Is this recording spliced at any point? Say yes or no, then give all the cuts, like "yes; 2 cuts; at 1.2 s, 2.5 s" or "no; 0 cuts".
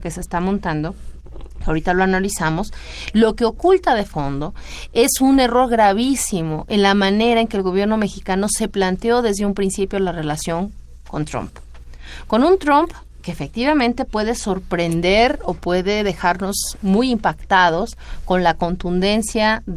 no; 0 cuts